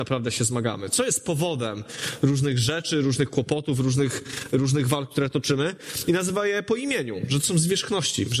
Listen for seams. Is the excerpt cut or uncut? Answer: uncut